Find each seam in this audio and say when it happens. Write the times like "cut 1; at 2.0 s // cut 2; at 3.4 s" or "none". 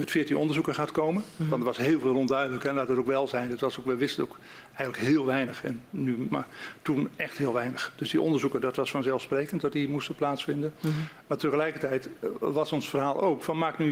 cut 1; at 6.3 s